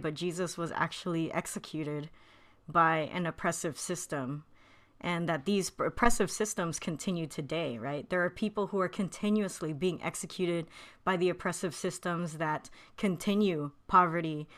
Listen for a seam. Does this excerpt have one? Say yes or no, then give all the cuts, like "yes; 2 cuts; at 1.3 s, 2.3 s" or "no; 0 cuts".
no; 0 cuts